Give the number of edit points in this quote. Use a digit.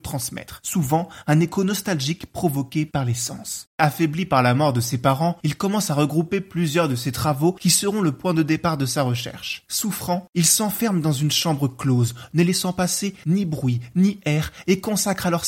0